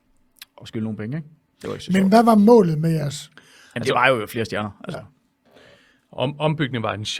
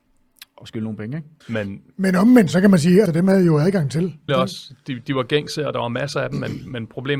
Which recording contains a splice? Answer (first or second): second